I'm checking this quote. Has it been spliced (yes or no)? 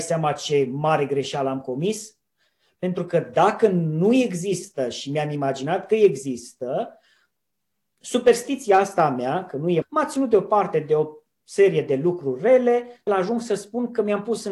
yes